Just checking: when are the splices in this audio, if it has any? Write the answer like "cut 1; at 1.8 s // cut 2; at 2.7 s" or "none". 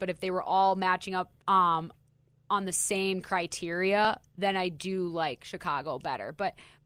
cut 1; at 1.4 s